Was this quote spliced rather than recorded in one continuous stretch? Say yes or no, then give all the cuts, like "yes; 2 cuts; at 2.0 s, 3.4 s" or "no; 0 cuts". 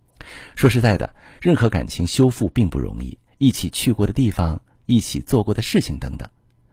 yes; 2 cuts; at 3.3 s, 4.8 s